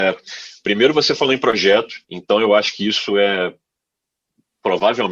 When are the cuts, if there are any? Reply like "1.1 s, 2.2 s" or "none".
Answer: 2.0 s